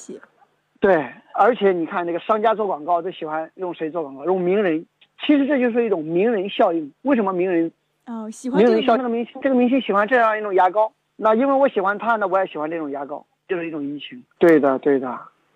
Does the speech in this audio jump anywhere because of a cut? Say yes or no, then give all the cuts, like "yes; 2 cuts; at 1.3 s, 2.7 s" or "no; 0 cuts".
yes; 2 cuts; at 8.9 s, 14.4 s